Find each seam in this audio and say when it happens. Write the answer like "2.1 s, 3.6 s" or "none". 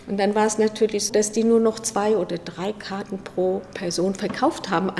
1.1 s

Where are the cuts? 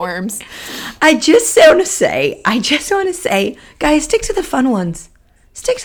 none

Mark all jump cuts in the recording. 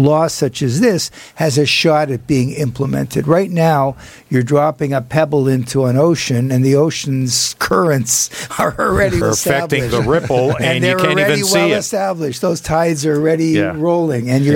9.2 s

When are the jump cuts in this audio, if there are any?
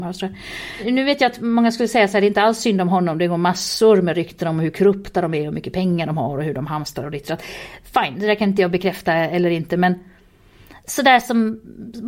none

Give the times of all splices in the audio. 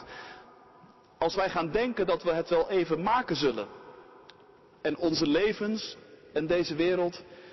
none

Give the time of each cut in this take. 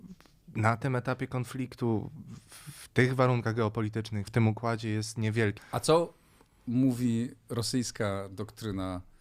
4.3 s, 5.6 s

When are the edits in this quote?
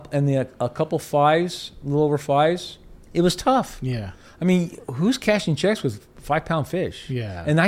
3.0 s

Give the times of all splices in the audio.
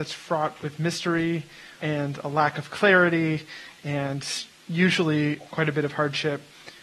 1.8 s

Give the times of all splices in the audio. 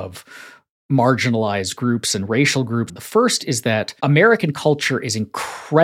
2.9 s, 4.0 s

